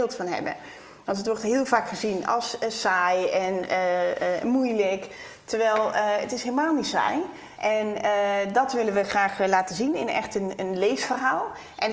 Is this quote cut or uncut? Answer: cut